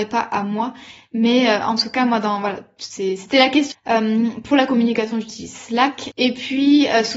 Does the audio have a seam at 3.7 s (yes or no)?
yes